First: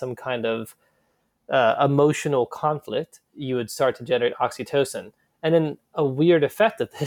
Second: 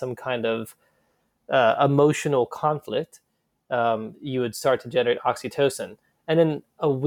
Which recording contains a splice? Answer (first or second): first